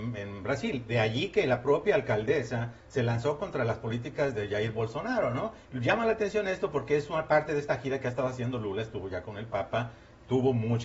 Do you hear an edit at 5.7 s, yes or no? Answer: yes